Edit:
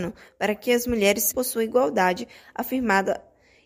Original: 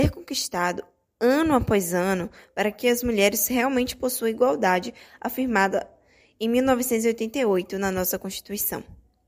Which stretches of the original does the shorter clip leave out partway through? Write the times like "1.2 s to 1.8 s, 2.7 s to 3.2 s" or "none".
3.5 s to 4.0 s